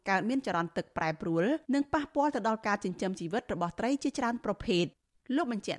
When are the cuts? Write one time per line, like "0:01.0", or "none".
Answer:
0:01.6